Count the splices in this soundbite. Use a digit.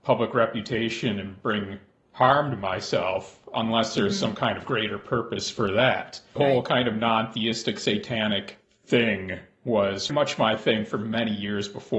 2